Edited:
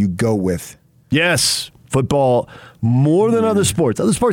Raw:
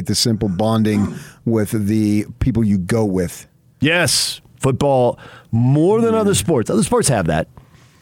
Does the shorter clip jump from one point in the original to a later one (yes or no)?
no